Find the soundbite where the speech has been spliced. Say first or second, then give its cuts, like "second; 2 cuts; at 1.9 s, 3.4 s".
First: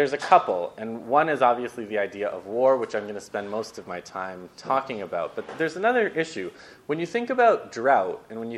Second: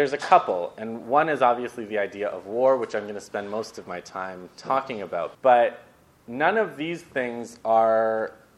second; 1 cut; at 5.3 s